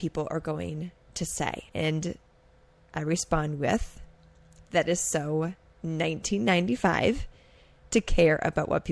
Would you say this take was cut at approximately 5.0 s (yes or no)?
no